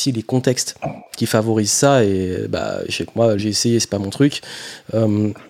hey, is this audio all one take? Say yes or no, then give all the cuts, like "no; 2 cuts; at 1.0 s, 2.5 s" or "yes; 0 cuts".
no; 1 cut; at 3.4 s